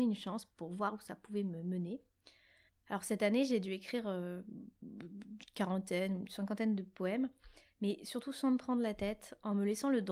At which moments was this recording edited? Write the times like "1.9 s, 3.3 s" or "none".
2.7 s